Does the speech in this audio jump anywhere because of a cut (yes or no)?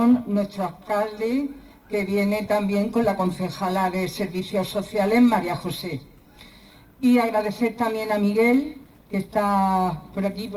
no